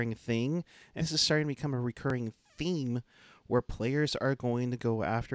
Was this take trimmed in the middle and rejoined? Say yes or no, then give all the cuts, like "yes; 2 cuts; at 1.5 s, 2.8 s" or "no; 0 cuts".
yes; 1 cut; at 1.0 s